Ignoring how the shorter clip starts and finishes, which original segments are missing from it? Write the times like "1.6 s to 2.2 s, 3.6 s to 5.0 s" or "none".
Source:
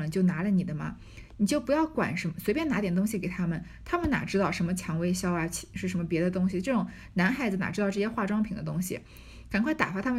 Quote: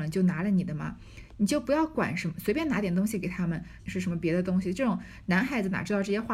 3.8 s to 5.7 s